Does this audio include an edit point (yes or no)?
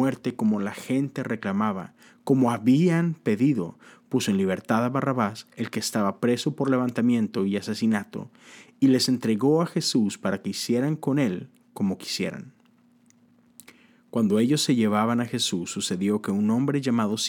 no